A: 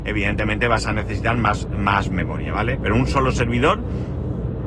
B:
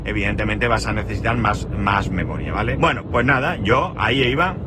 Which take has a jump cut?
B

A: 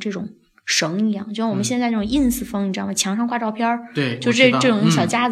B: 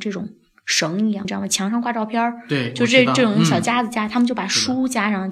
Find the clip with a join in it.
B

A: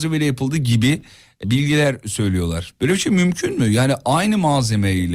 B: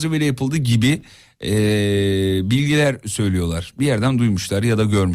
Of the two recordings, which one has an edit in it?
A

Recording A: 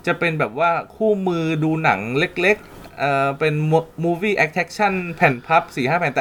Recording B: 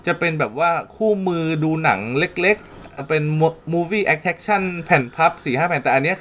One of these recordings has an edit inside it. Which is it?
B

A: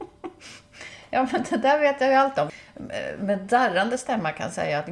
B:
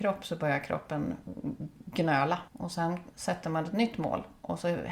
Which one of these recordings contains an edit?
B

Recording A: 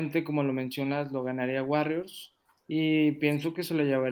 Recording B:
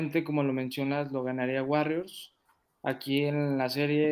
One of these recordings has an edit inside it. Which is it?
A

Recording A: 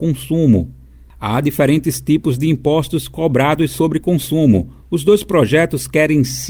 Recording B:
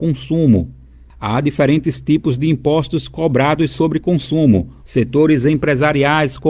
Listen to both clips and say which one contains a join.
B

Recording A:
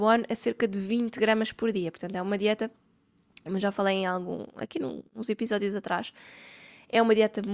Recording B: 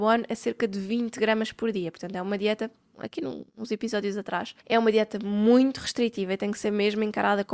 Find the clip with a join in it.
B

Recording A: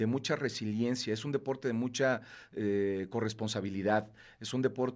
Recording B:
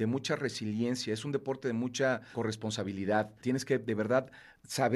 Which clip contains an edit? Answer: B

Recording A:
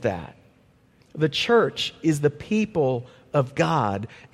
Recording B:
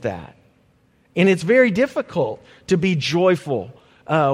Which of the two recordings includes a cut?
A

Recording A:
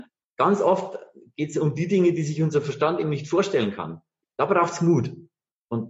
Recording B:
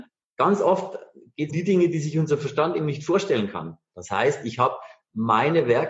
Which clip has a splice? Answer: B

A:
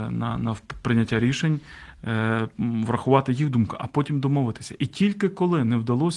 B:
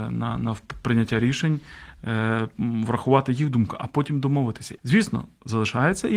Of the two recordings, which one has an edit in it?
B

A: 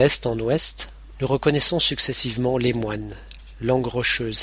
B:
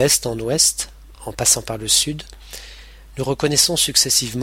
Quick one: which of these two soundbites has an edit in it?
A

